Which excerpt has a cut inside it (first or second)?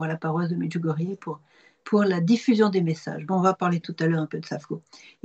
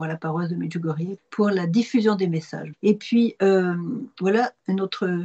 second